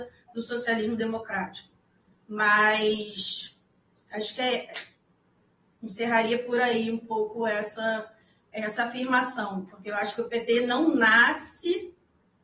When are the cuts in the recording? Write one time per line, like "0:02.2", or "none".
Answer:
none

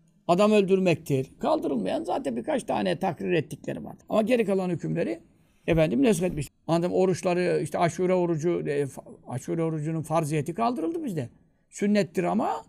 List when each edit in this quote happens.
0:01.4
0:04.0
0:06.5

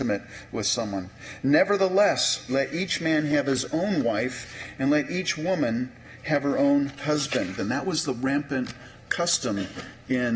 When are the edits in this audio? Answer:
0:02.5
0:07.6
0:09.1

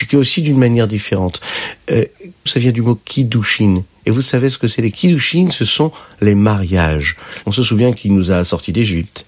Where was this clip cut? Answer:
0:02.5
0:04.9
0:07.4

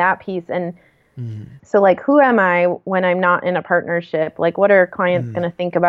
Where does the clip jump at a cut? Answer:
0:01.6

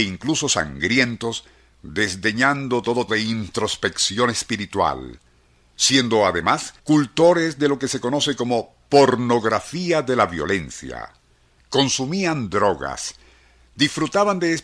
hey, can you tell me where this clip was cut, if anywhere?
0:03.1
0:06.8
0:11.6

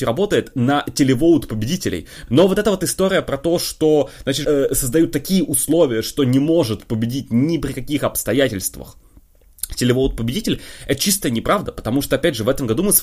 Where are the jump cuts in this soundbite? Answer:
0:02.3
0:04.4

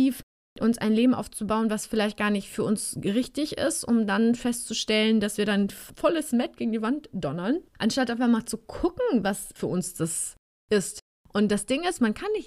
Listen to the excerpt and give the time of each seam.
0:07.7
0:09.6

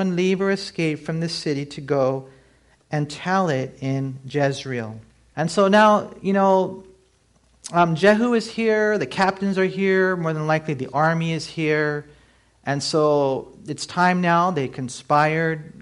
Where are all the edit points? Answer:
0:05.3

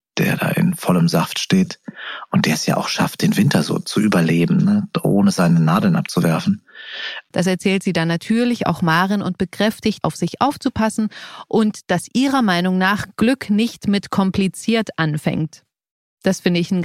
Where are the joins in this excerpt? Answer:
0:07.3
0:10.0

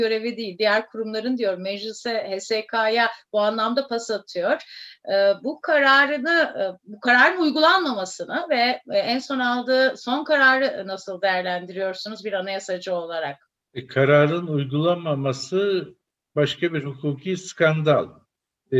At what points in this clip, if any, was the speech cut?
none

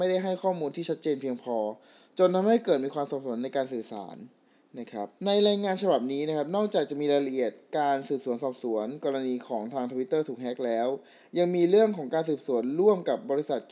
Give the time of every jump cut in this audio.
0:05.2

